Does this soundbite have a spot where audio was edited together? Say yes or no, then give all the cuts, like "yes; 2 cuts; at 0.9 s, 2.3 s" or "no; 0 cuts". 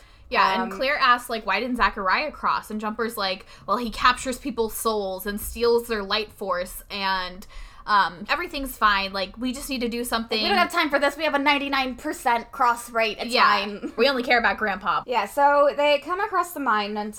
yes; 3 cuts; at 8.3 s, 14.0 s, 15.0 s